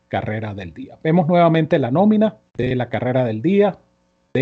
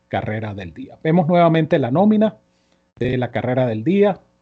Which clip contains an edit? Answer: first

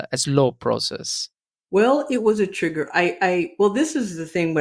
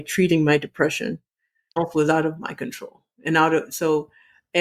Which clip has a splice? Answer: second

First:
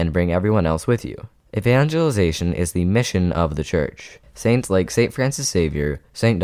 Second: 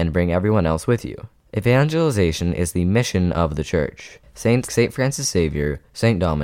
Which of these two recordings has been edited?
second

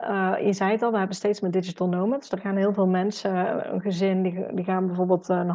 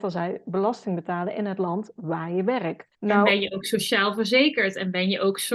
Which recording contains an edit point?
second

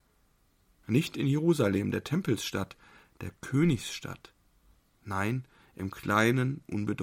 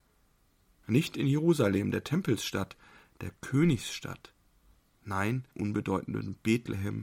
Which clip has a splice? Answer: second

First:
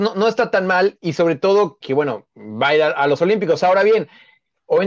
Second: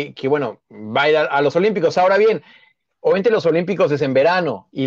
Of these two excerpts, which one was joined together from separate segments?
first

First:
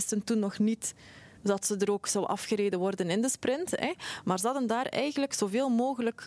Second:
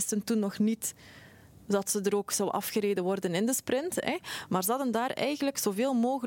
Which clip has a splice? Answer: first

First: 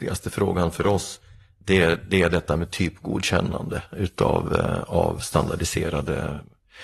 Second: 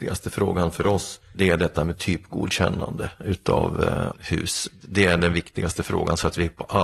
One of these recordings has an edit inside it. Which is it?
second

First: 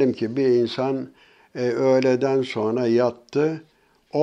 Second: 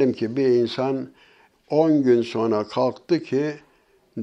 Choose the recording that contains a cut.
second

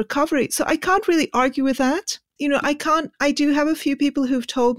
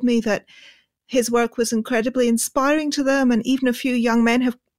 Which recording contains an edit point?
first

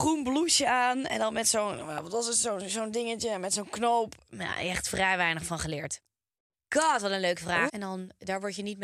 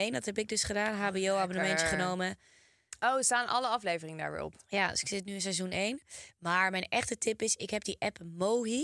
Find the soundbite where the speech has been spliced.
first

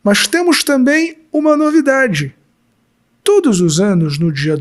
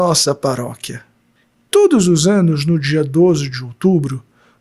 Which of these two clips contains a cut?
second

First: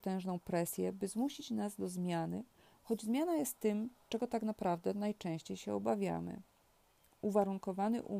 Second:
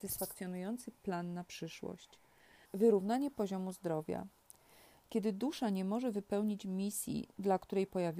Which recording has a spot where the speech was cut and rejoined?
second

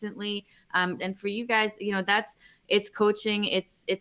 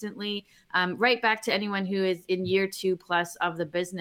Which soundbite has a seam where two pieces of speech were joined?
first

